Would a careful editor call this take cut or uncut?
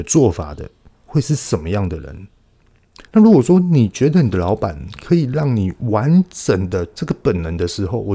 cut